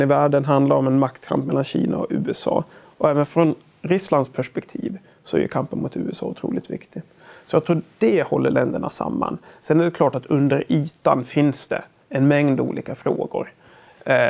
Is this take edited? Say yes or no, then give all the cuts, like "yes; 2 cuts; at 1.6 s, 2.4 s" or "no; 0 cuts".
no; 0 cuts